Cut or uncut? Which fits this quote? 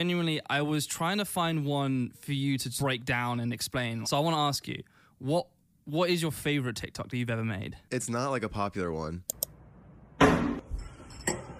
cut